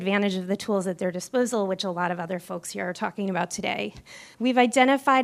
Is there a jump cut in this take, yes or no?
yes